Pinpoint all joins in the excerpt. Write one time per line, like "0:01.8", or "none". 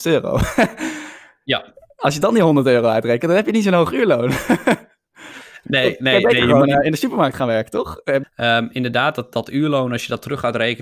0:08.2